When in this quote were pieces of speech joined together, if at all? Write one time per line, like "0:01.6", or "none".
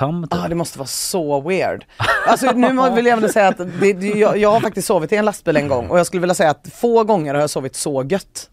none